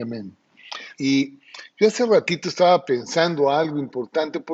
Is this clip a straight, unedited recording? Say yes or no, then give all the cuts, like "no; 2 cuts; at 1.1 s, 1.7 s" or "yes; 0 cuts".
no; 1 cut; at 0.9 s